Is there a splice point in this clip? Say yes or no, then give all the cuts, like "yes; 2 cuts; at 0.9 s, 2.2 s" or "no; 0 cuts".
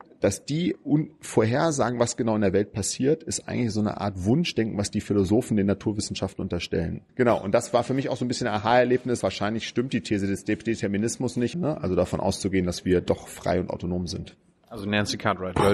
yes; 3 cuts; at 7.1 s, 9.2 s, 11.5 s